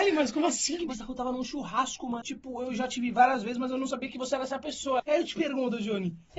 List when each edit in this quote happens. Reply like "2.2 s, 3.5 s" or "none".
2.2 s, 5.0 s